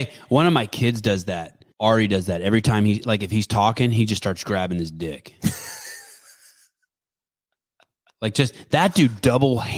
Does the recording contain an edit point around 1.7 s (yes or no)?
yes